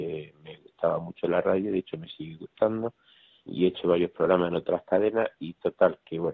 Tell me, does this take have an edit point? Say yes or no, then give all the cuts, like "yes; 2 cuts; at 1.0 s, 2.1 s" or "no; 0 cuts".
yes; 1 cut; at 3.5 s